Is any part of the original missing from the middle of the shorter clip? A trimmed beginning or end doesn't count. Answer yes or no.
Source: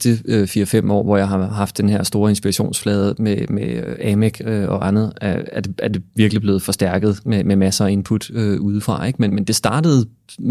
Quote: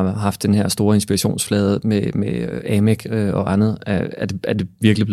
no